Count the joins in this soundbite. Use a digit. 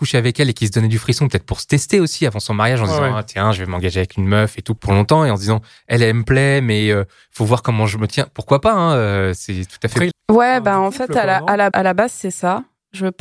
3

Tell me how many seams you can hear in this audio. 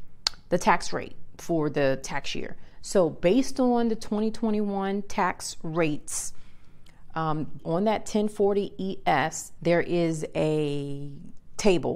2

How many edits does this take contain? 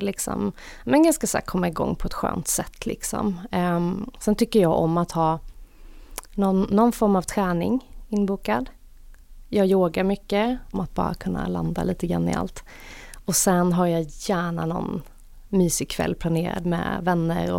1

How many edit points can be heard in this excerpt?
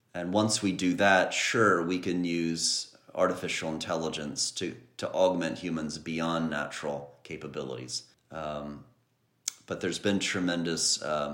1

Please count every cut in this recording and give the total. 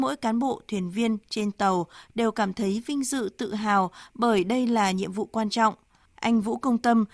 1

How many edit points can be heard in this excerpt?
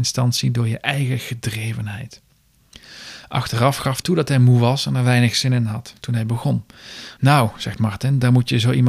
2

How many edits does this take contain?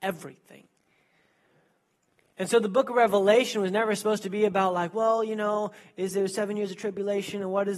0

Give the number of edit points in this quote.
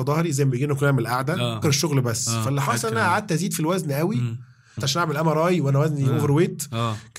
2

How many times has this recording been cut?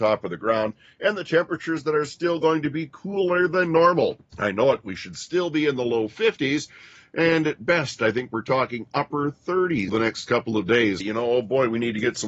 3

